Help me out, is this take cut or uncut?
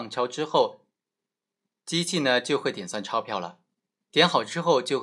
uncut